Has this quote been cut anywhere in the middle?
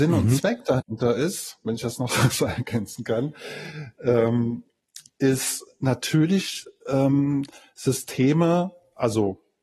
yes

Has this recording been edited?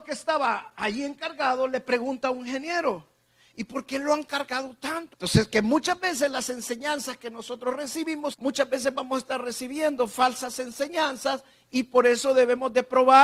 yes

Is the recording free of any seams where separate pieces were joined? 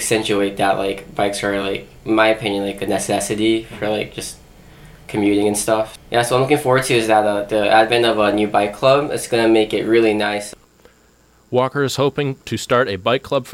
yes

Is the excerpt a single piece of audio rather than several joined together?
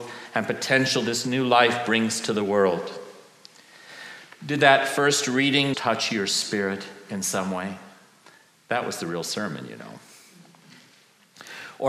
no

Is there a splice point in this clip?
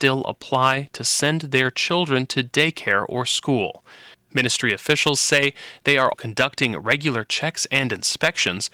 yes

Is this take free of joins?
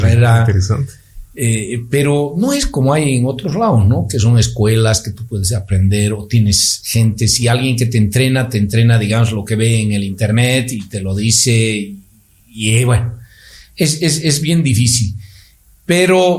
yes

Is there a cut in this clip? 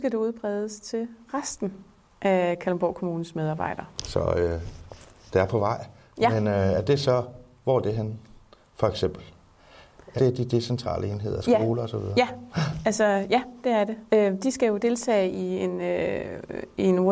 yes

